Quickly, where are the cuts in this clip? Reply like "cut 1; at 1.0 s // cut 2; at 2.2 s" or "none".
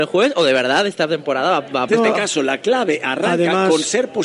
cut 1; at 1.9 s